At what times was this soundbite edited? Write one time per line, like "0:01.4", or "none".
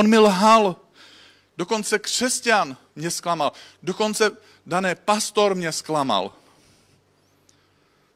none